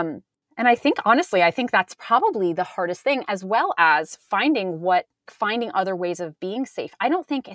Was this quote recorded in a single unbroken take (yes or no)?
no